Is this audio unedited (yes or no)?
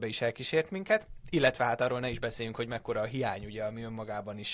yes